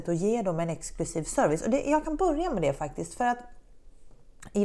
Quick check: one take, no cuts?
yes; 0 cuts

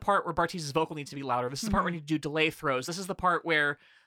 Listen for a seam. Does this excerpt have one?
no; 0 cuts

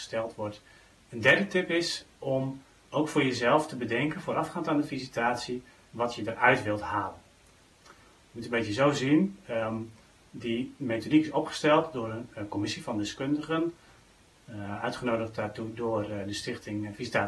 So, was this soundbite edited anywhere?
yes; 2 cuts; at 1.0 s, 7.7 s

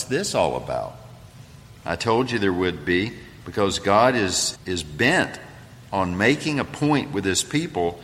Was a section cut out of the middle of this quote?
yes; 2 cuts; at 1.8 s, 4.6 s

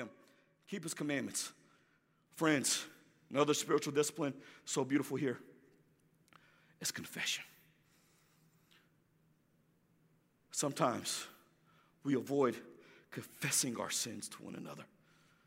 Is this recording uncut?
no; 1 cut; at 2.3 s

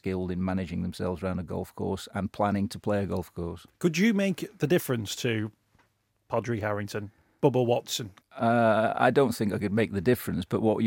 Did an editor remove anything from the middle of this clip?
yes; 1 cut; at 8.2 s

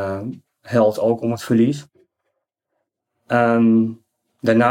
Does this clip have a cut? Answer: no; 0 cuts

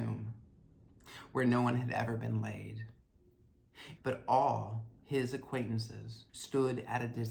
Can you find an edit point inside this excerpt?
yes; 2 cuts; at 4.0 s, 6.3 s

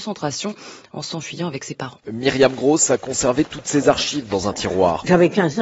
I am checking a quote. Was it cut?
yes; 1 cut; at 2.0 s

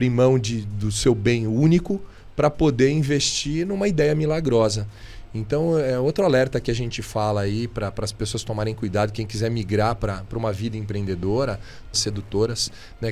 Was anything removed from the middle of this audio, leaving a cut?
yes; 1 cut; at 11.9 s

